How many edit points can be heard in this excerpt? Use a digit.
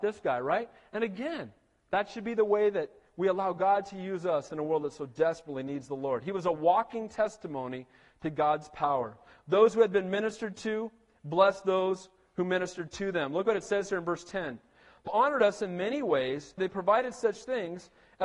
2